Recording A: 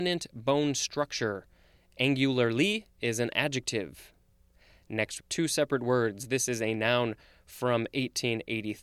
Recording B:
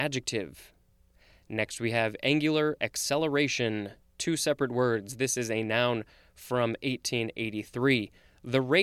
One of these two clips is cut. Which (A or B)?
A